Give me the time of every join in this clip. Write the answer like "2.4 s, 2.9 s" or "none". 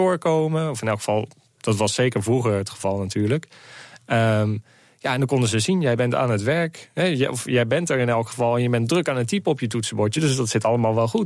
none